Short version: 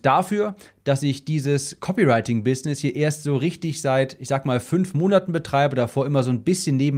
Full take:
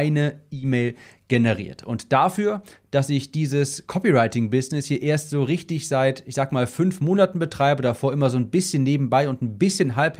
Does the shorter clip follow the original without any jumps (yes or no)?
yes